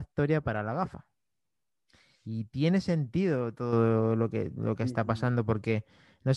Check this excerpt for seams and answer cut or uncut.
uncut